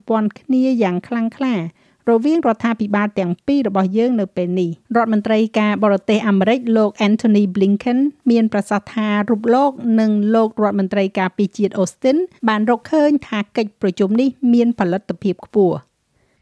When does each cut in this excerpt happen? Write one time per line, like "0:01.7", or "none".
0:04.8
0:12.4